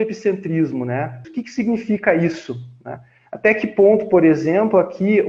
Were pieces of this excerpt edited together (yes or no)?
yes